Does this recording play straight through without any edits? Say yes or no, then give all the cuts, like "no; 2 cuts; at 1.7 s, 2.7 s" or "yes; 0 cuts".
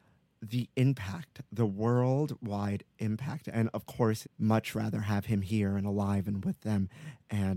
no; 1 cut; at 4.2 s